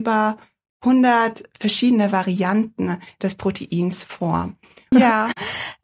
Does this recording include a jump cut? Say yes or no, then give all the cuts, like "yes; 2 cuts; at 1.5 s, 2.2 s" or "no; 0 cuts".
yes; 1 cut; at 4.9 s